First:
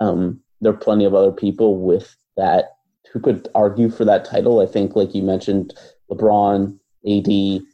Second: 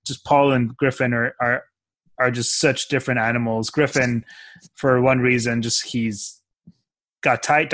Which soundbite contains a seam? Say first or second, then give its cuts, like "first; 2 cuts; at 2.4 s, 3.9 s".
first; 1 cut; at 3.0 s